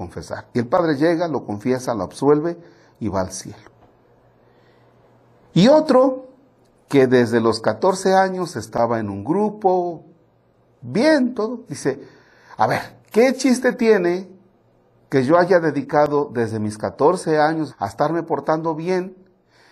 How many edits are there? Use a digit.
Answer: 2